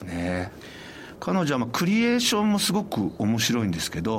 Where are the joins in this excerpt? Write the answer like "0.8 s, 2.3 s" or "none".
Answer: 1.2 s